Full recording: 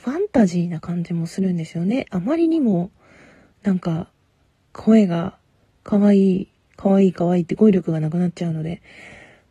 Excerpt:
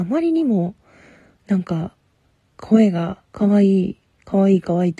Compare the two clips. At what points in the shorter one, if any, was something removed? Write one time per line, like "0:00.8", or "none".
0:03.3